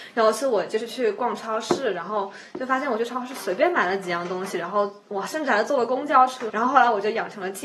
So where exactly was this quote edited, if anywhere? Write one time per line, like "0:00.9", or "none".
0:06.5